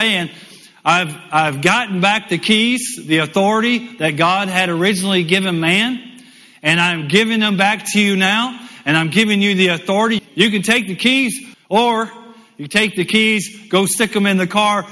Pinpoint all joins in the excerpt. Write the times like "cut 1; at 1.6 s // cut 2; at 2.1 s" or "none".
cut 1; at 10.2 s // cut 2; at 11.5 s